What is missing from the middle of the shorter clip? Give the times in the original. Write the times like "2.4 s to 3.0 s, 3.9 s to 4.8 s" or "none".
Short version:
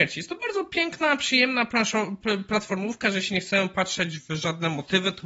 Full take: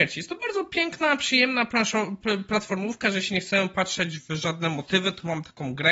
none